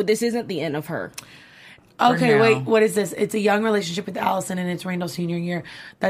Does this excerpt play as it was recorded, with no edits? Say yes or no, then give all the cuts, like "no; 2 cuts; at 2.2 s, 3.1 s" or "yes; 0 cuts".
yes; 0 cuts